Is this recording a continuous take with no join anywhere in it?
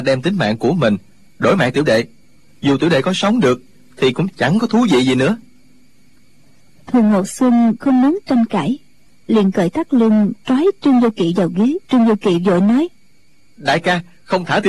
no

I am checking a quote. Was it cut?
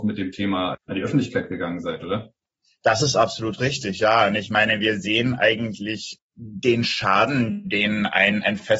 no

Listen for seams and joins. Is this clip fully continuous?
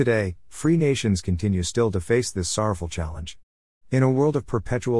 yes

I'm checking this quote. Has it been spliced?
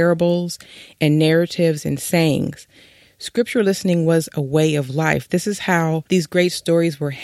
yes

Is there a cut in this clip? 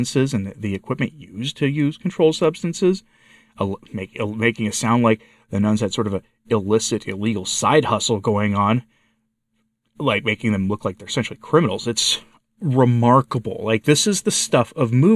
no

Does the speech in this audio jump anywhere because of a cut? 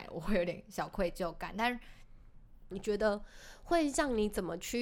yes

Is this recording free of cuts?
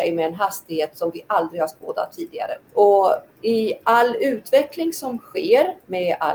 no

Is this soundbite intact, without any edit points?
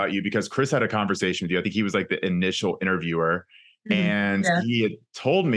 yes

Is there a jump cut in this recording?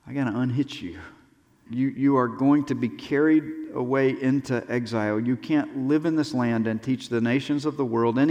yes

